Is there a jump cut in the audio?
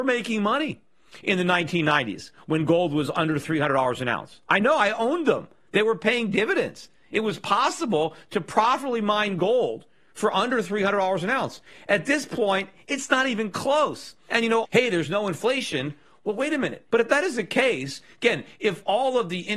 yes; 2 cuts; at 14.6 s, 16.9 s

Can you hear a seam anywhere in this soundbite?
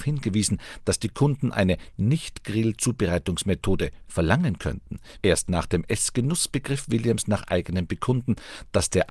yes; 2 cuts; at 4.0 s, 5.2 s

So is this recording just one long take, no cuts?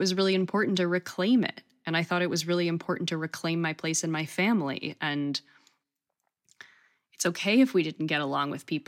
yes; 0 cuts

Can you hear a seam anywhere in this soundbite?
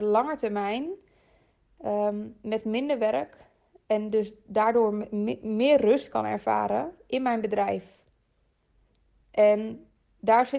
no; 0 cuts

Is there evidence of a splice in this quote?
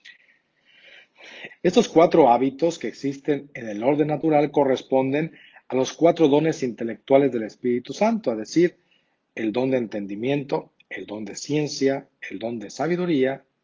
yes; 1 cut; at 1.5 s

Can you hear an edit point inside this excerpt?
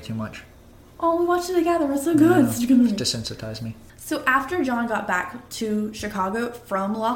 no; 0 cuts

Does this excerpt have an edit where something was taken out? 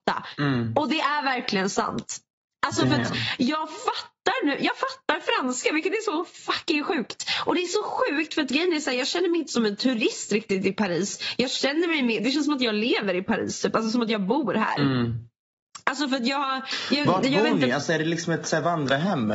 no; 0 cuts

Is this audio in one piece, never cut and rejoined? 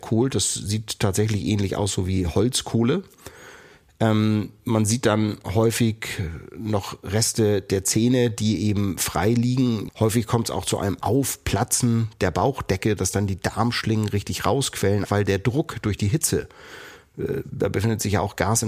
no; 2 cuts; at 9.9 s, 15.0 s

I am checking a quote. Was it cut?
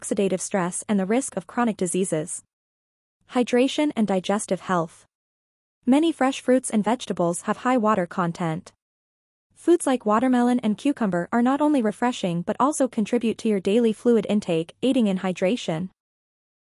no; 0 cuts

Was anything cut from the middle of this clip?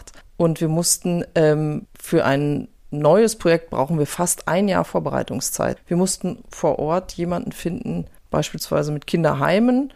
yes; 2 cuts; at 5.8 s, 8.3 s

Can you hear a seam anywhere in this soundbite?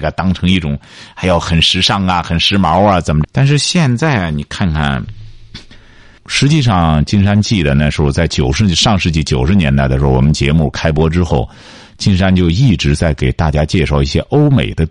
yes; 2 cuts; at 3.2 s, 6.2 s

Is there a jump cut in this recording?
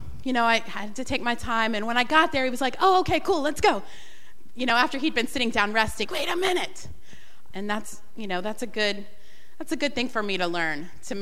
yes; 2 cuts; at 6.0 s, 7.5 s

